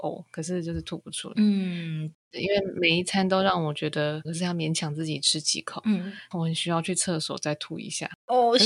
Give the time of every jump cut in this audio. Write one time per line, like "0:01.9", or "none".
0:01.3
0:04.2
0:06.3